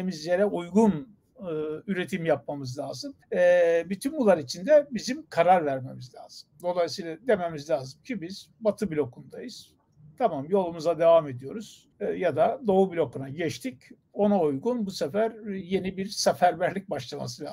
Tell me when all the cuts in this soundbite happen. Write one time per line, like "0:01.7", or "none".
0:03.2
0:11.9